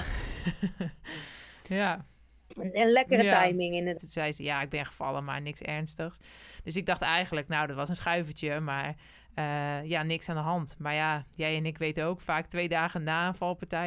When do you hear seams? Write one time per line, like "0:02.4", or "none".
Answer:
0:04.0